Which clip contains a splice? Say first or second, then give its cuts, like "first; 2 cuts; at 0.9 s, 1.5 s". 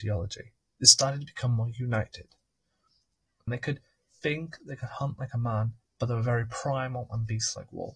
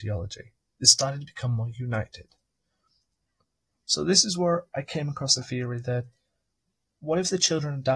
first; 3 cuts; at 3.5 s, 4.6 s, 5.8 s